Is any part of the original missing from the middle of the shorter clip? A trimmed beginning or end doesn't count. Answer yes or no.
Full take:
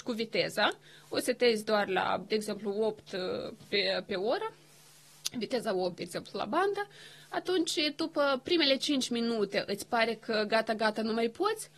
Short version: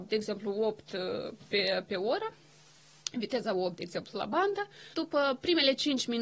yes